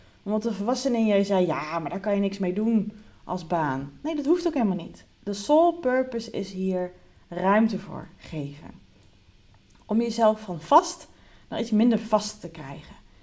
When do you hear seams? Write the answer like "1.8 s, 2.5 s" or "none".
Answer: 5.1 s

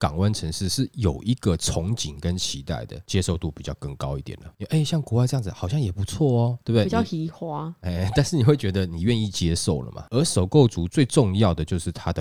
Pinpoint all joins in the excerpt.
10.1 s

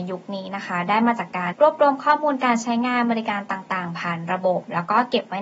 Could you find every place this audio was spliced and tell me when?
1.5 s

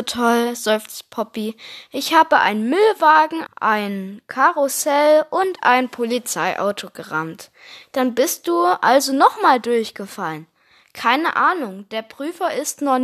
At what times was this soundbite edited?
3.5 s

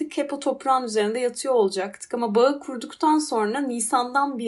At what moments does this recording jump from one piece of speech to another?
none

